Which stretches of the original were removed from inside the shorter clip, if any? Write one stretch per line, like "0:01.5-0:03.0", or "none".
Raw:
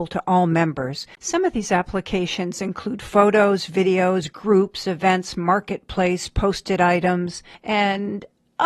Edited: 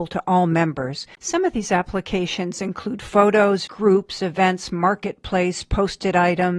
0:03.7-0:04.3